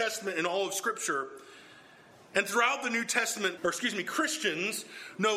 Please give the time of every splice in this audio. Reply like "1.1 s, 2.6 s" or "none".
3.6 s

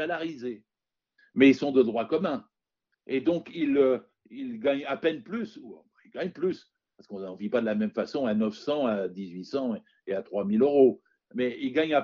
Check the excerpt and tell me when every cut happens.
1.2 s

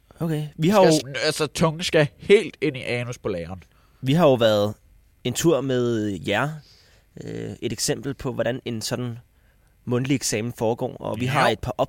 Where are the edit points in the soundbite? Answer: 1.0 s

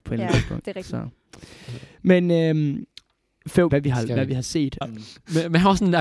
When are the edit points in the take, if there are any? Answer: 3.7 s, 4.8 s

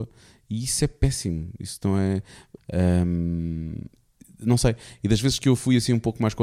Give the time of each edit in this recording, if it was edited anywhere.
2.6 s

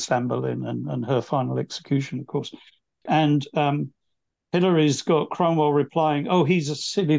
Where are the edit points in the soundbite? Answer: 3.1 s

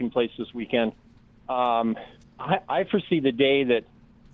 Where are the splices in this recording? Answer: none

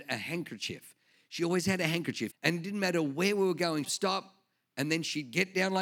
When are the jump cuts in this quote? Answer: 2.3 s, 3.8 s

